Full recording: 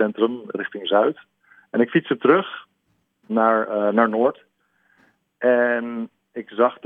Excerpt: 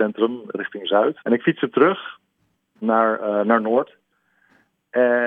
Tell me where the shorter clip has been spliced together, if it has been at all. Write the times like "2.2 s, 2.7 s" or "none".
1.2 s